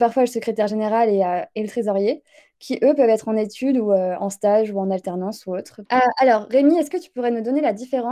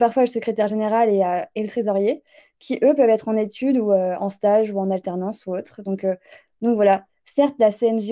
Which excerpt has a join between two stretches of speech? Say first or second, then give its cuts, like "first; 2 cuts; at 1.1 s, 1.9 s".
first; 1 cut; at 5.9 s